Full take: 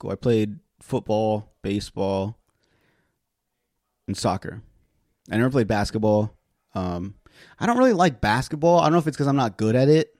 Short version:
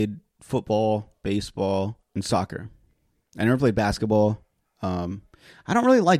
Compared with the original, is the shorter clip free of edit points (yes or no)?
no